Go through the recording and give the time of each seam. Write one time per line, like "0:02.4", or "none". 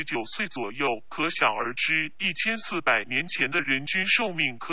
0:03.6